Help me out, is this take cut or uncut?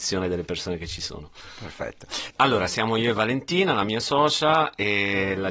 cut